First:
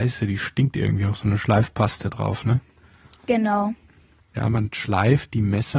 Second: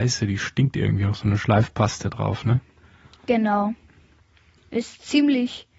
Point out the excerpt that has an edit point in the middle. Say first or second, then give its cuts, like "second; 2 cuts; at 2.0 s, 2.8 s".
first; 1 cut; at 4.3 s